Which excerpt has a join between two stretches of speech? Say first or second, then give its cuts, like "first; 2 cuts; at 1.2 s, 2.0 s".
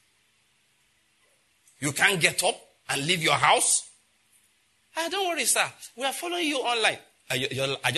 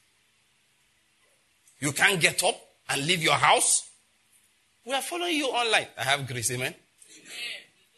second; 2 cuts; at 4.8 s, 6.0 s